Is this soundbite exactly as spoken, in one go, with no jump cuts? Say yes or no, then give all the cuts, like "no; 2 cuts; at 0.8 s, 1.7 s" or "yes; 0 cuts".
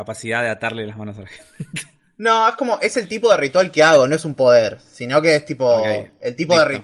yes; 0 cuts